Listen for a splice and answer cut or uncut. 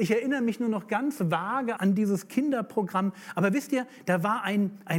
cut